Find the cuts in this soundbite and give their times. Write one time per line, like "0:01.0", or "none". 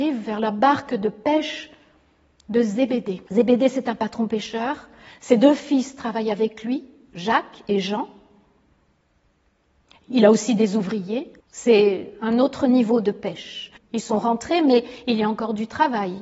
0:03.3
0:11.4
0:13.8